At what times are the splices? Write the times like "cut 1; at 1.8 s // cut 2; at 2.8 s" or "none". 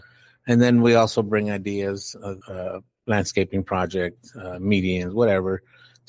cut 1; at 2.4 s